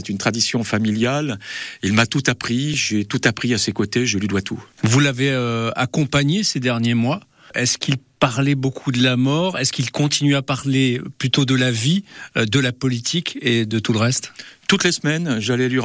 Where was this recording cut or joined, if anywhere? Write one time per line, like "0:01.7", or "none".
none